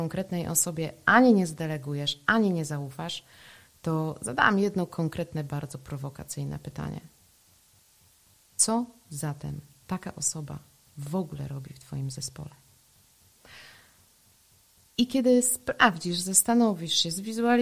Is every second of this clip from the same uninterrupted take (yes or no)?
yes